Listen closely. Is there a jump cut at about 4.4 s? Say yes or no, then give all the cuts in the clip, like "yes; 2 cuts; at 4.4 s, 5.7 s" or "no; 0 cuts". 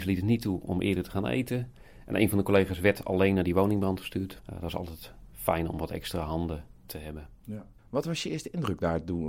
yes; 2 cuts; at 4.4 s, 7.8 s